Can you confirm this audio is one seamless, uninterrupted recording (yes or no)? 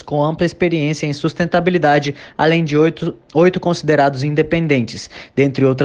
yes